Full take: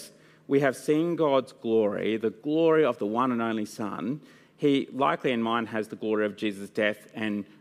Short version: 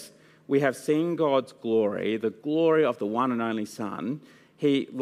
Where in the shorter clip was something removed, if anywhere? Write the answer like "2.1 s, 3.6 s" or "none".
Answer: none